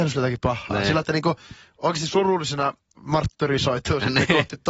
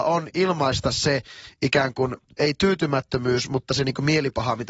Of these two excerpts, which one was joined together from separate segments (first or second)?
first